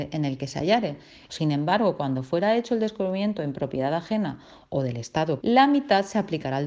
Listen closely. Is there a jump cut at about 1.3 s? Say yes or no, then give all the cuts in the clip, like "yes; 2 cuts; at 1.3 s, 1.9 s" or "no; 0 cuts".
yes; 2 cuts; at 1.3 s, 5.4 s